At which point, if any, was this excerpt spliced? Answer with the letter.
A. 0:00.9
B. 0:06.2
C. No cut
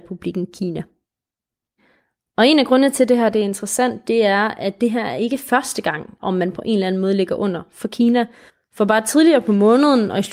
B